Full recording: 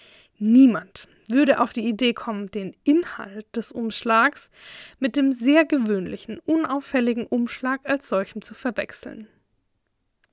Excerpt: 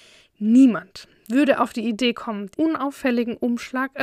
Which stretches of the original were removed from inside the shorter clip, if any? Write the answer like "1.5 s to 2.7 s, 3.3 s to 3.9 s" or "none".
2.5 s to 6.4 s